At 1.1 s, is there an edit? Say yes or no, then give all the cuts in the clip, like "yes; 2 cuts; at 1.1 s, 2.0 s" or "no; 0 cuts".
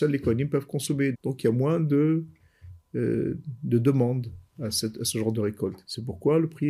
yes; 1 cut; at 1.1 s